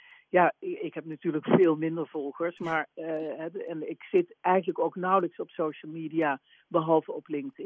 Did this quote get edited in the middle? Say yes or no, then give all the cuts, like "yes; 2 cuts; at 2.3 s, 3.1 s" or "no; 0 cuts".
no; 0 cuts